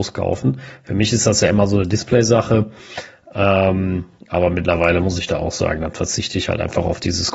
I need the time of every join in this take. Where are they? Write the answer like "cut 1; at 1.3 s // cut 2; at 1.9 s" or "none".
none